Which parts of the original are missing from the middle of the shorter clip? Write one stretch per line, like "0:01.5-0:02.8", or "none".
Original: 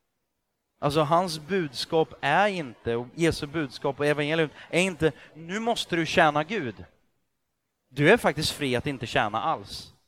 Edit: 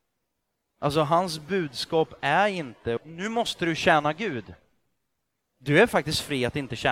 0:03.0-0:05.3